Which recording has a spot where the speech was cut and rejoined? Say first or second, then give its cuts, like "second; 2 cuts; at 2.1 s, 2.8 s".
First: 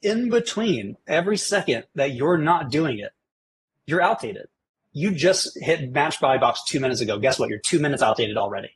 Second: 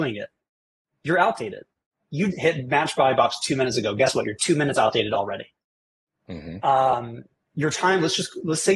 second; 2 cuts; at 2.3 s, 6.6 s